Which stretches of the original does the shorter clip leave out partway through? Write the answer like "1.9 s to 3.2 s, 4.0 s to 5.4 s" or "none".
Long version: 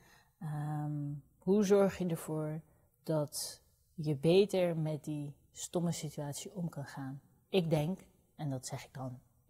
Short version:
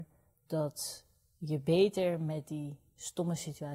none